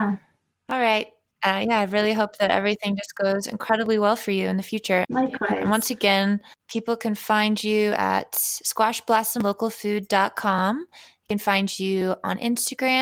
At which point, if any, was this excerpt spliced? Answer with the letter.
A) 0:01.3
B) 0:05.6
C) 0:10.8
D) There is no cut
A